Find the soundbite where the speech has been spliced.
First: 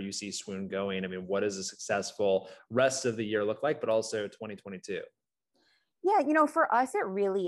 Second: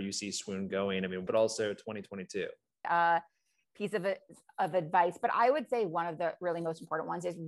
second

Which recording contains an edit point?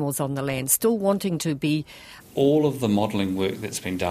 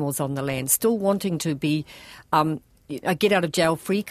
first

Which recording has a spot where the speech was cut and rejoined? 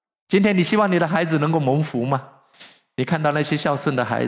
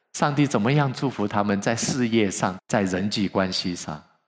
second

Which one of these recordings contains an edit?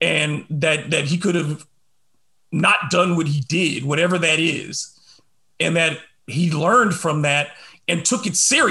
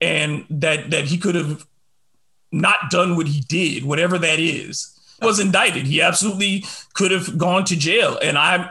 second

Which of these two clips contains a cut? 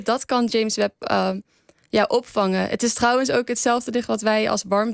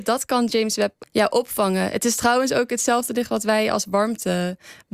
second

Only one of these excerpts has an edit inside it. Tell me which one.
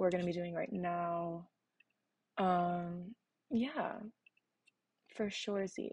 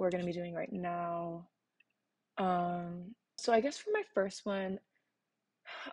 second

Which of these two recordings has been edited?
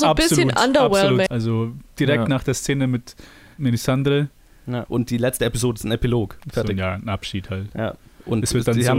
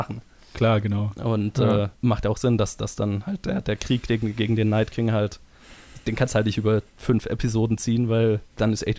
first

